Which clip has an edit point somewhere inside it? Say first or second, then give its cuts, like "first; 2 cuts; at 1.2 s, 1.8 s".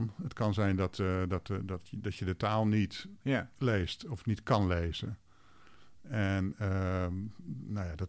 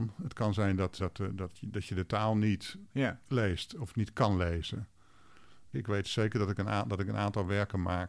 second; 2 cuts; at 1.0 s, 5.7 s